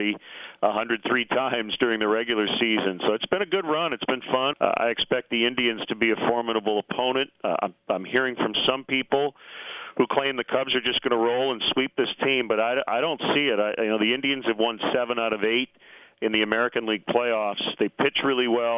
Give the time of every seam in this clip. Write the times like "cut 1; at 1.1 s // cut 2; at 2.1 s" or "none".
cut 1; at 4.5 s